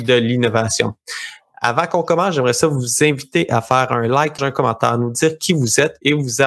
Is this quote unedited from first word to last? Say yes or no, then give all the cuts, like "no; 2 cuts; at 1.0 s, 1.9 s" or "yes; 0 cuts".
no; 1 cut; at 4.4 s